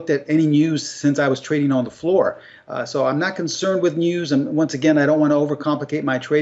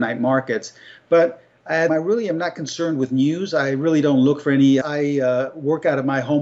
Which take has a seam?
second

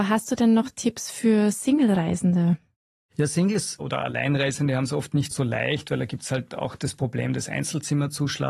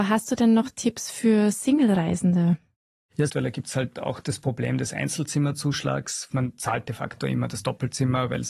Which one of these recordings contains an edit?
second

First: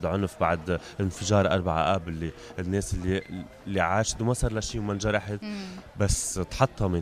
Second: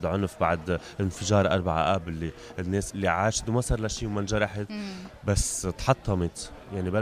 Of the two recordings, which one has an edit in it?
second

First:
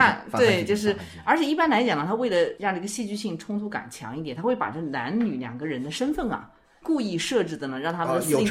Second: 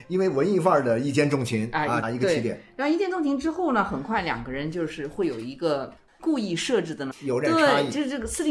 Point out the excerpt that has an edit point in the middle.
second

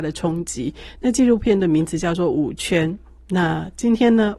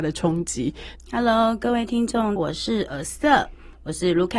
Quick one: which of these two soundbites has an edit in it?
second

